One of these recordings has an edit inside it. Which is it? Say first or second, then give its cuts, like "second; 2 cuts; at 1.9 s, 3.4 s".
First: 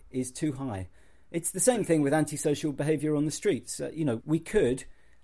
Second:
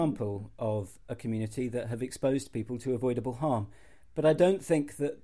first; 1 cut; at 4.2 s